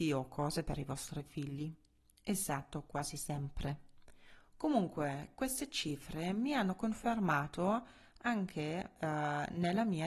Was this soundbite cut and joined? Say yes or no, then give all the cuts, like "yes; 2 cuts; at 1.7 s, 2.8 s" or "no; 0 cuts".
no; 0 cuts